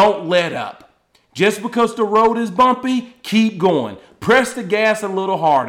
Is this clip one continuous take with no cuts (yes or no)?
yes